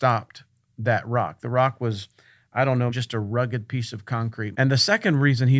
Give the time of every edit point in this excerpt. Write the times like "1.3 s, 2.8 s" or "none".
2.9 s, 4.5 s